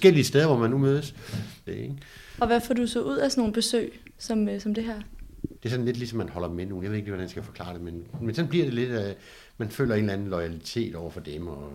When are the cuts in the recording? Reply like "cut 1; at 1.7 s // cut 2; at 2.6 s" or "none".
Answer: cut 1; at 1.7 s // cut 2; at 5.6 s